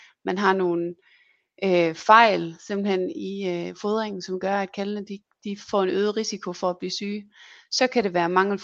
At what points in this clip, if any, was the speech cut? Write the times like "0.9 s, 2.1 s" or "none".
none